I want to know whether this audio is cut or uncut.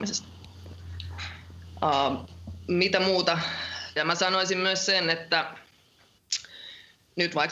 cut